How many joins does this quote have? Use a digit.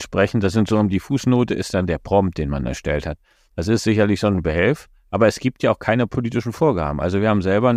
0